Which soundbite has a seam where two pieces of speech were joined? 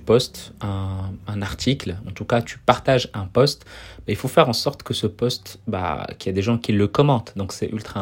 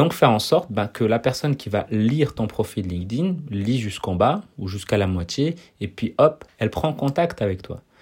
first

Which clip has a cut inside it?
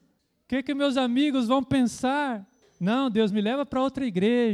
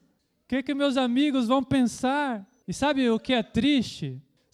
second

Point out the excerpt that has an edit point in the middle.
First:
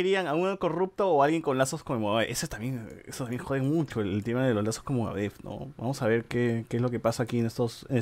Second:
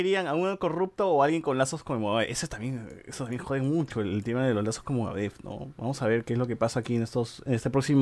second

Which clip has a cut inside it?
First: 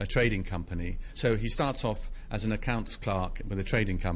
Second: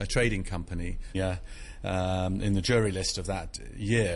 second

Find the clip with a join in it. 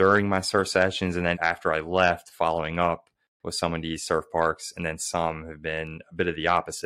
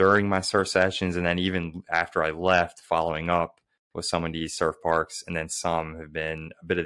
first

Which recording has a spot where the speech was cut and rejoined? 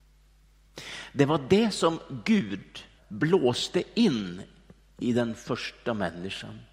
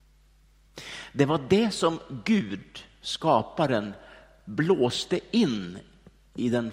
first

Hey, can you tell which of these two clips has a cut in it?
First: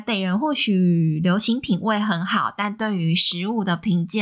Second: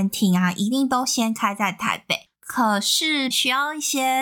second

